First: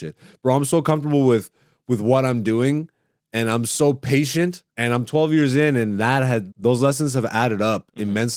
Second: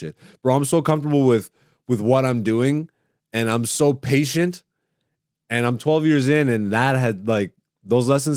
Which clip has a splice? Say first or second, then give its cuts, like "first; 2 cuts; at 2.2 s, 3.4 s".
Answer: first; 2 cuts; at 4.7 s, 6.5 s